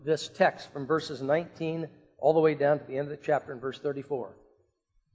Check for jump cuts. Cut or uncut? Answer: uncut